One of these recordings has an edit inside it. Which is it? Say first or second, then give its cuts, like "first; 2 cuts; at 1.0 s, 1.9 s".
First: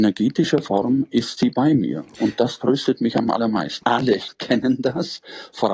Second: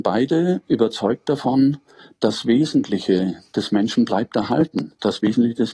first; 1 cut; at 3.8 s